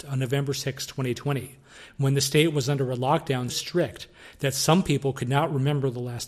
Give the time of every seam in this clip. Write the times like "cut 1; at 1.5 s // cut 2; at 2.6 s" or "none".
cut 1; at 3.5 s